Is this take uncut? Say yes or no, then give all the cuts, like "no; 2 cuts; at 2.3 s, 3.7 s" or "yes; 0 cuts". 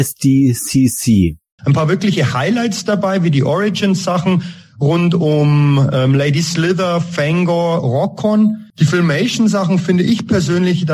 no; 2 cuts; at 1.6 s, 8.7 s